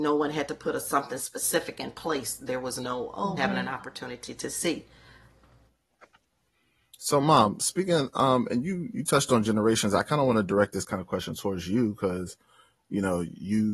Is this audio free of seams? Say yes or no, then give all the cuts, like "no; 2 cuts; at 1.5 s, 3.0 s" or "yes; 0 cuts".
no; 1 cut; at 3.4 s